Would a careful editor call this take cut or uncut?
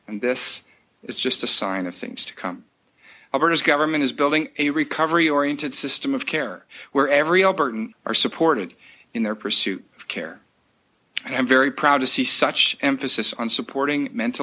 cut